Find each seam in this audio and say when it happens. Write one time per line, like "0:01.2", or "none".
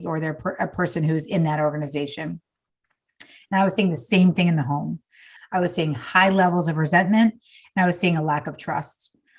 0:05.4